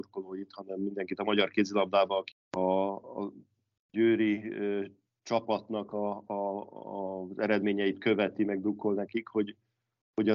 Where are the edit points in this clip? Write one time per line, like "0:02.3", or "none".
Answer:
0:02.3